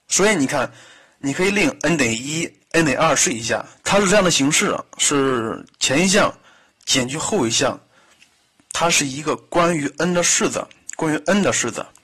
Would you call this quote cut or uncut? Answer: cut